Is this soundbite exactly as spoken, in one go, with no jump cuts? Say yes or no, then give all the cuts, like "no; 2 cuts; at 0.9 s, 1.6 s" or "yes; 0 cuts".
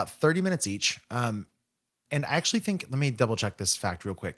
yes; 0 cuts